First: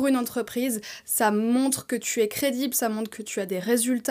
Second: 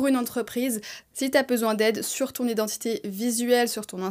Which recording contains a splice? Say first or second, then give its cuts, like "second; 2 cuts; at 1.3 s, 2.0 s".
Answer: second; 1 cut; at 1.0 s